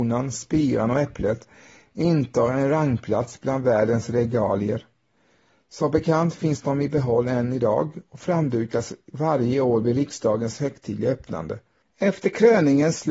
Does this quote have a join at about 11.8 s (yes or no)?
yes